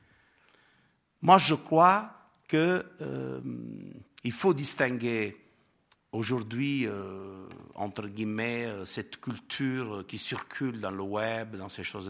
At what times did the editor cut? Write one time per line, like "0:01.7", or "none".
none